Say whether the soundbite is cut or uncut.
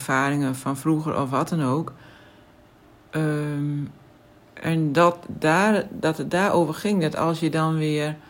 uncut